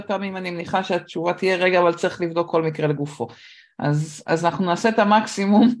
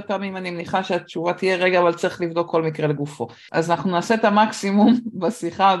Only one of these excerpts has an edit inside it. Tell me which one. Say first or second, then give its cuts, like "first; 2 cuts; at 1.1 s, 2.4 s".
second; 1 cut; at 3.5 s